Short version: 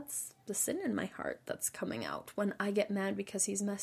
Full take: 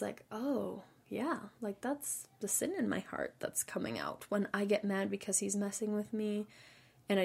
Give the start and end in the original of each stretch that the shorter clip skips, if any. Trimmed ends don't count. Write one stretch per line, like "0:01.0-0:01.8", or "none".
none